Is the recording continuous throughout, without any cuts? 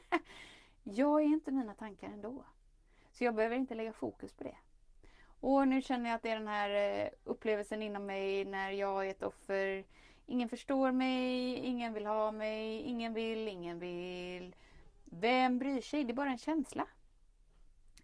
yes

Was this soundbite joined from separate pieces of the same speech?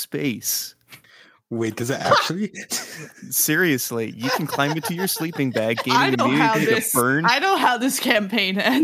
no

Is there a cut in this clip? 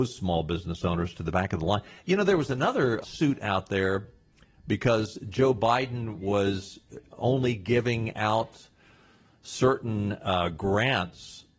yes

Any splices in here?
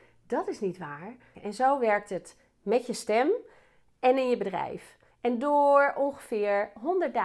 yes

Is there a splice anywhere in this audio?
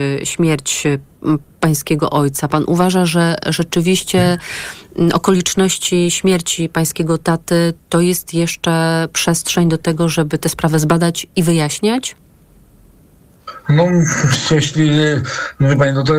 no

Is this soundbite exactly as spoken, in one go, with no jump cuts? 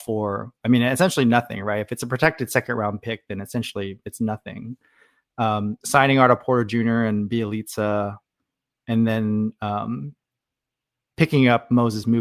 yes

